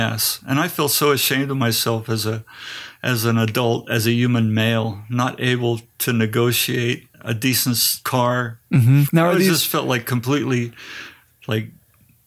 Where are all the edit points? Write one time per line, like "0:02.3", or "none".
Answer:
0:08.0
0:09.1